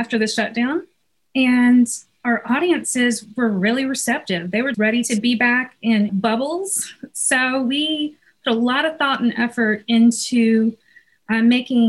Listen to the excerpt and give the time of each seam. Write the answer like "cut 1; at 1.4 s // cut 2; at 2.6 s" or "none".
cut 1; at 4.7 s // cut 2; at 6.1 s